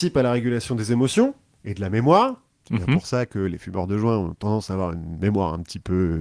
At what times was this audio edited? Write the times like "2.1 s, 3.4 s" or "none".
none

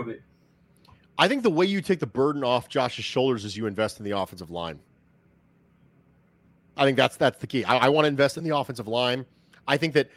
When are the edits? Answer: none

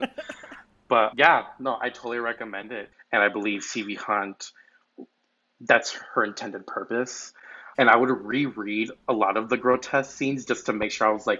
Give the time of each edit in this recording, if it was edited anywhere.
1.1 s, 2.9 s, 7.7 s

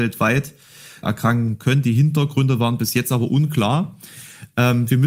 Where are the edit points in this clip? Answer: 1.0 s

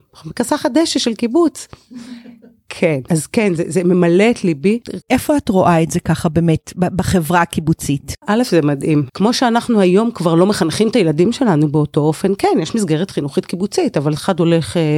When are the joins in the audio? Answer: 3.1 s, 5.0 s, 9.1 s

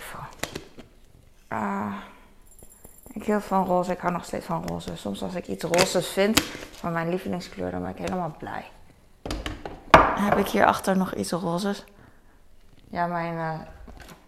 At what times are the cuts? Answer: none

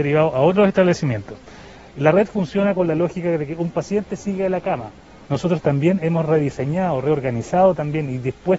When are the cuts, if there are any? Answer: 5.3 s

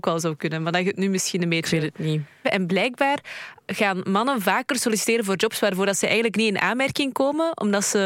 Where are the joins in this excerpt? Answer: 2.4 s, 3.7 s

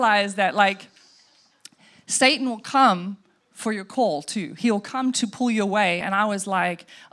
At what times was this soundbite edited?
none

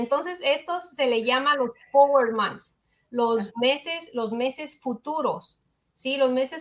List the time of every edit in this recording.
3.5 s

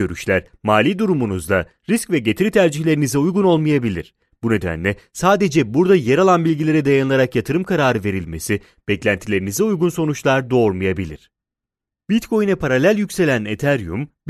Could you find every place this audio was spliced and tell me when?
none

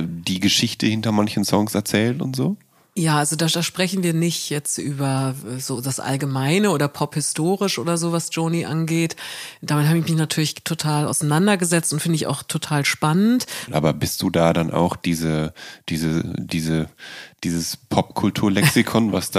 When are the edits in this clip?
13.7 s

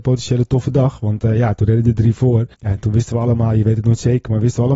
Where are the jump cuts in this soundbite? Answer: 2.5 s

